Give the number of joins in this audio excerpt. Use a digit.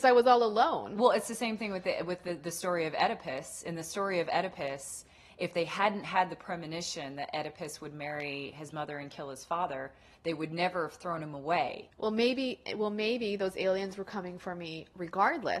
1